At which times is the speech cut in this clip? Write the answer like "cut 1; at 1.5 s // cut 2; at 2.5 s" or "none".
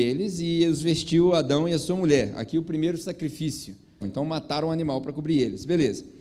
cut 1; at 4.0 s

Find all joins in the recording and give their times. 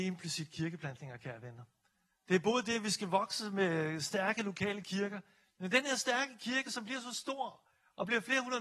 none

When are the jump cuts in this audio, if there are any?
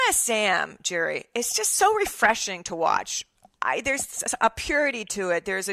none

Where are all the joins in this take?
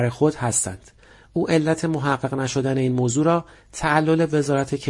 none

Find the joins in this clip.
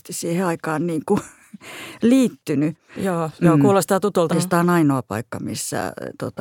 cut 1; at 2.9 s // cut 2; at 4.3 s

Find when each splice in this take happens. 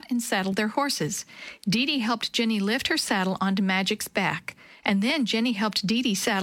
none

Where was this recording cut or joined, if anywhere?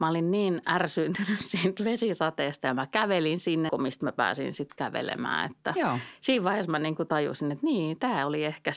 cut 1; at 3.7 s

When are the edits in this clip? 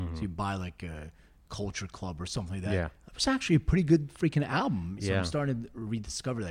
cut 1; at 3.1 s // cut 2; at 5.0 s

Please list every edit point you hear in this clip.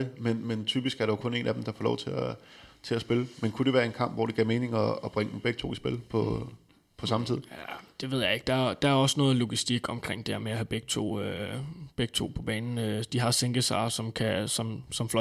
none

